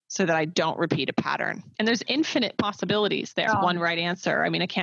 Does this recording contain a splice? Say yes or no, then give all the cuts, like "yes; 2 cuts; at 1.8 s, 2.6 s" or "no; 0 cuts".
yes; 2 cuts; at 1.7 s, 3.5 s